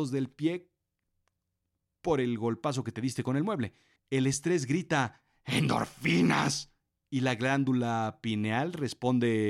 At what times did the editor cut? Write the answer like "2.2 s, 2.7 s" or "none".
4.0 s